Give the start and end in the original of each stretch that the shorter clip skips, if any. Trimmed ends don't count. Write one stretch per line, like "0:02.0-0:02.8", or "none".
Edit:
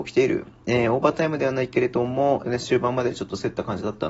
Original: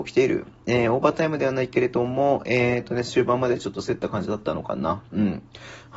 0:02.4-0:02.9